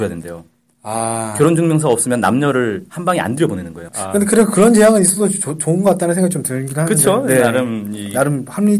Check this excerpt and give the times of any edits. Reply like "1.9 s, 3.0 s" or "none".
3.9 s